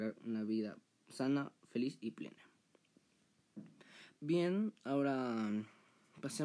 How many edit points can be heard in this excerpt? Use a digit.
1